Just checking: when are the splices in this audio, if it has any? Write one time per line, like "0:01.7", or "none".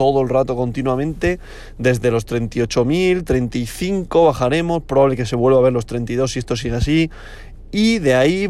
none